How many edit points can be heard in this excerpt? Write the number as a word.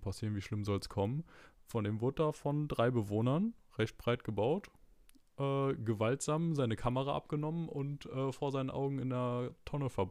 zero